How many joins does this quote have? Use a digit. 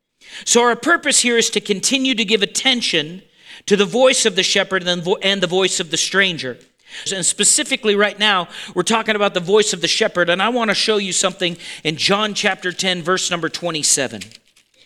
1